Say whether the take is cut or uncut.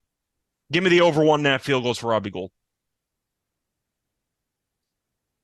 uncut